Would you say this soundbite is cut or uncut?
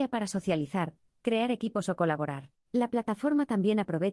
cut